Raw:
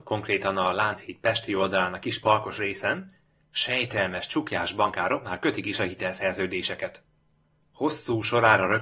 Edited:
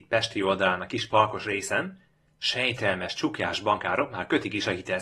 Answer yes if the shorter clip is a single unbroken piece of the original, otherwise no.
yes